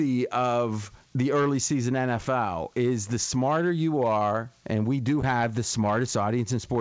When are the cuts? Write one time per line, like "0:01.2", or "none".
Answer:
0:01.1

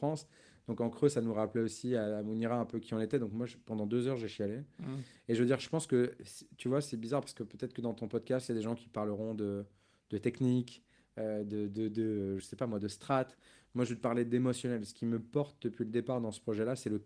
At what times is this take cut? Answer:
none

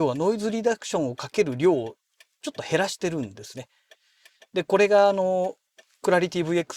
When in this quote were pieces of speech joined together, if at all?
0:04.3

